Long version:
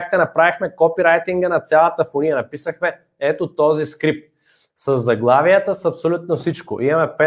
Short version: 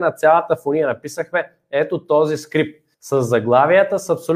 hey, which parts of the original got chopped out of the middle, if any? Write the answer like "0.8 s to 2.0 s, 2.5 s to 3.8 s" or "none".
4.4 s to 4.7 s